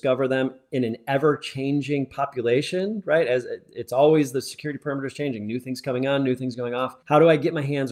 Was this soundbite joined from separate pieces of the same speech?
yes; 1 cut; at 7.0 s

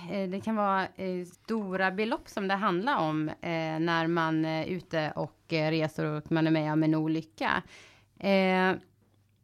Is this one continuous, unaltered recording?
no; 1 cut; at 1.3 s

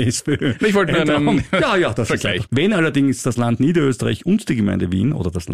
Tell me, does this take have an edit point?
yes; 1 cut; at 2.5 s

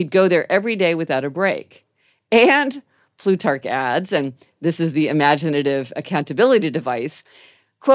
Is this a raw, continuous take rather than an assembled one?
yes; 0 cuts

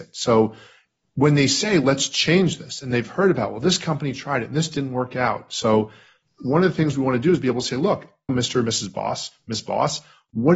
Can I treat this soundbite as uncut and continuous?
no; 1 cut; at 8.3 s

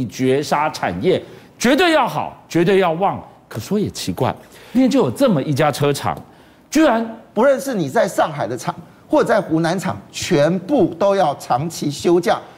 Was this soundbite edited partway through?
yes; 2 cuts; at 4.7 s, 7.3 s

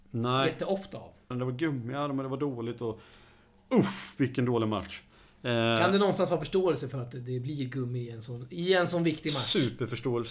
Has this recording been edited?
yes; 1 cut; at 1.3 s

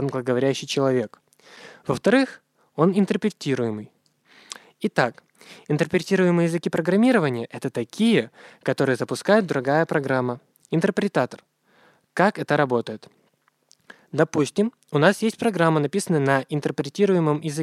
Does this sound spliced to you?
no; 0 cuts

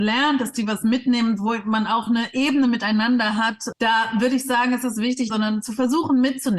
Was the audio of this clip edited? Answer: yes; 2 cuts; at 3.7 s, 5.3 s

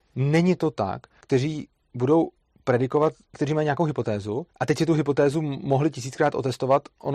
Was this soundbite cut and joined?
yes; 3 cuts; at 1.2 s, 3.3 s, 4.5 s

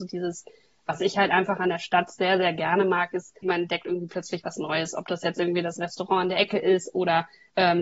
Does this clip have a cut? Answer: yes; 1 cut; at 3.4 s

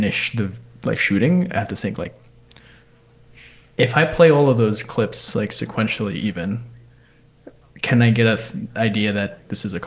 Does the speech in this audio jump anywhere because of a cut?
no; 0 cuts

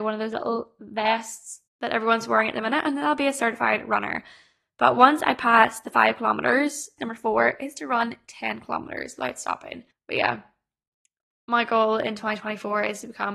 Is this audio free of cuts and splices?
no; 2 cuts; at 7.0 s, 9.9 s

